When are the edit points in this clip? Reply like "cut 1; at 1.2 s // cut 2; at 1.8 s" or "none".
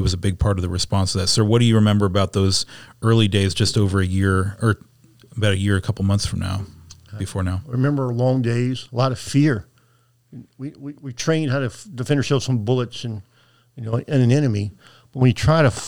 cut 1; at 8.9 s

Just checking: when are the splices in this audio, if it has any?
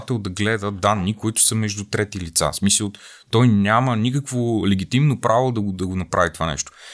none

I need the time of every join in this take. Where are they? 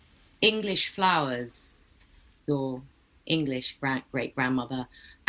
none

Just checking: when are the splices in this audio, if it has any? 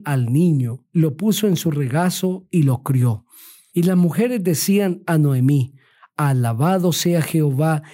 cut 1; at 3.7 s

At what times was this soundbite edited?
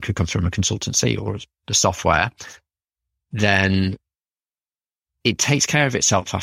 none

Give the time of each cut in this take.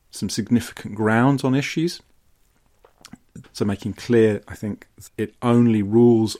cut 1; at 3.4 s // cut 2; at 5.1 s

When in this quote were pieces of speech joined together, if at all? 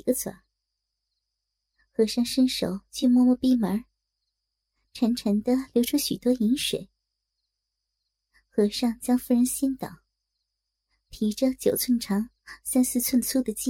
none

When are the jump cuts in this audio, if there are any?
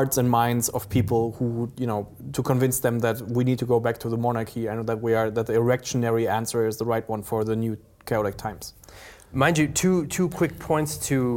none

